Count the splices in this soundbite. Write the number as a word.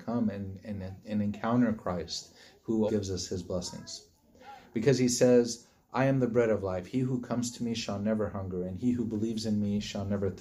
one